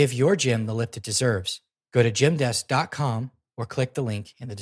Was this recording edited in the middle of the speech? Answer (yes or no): no